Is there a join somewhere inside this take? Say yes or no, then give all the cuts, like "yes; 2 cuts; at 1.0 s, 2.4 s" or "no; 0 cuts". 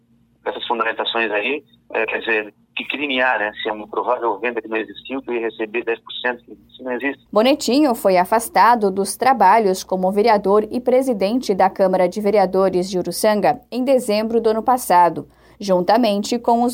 yes; 1 cut; at 7.3 s